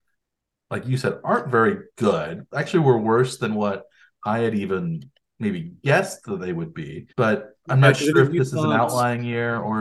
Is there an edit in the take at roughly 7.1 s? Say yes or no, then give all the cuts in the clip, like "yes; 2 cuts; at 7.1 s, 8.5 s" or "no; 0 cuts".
yes; 1 cut; at 7.1 s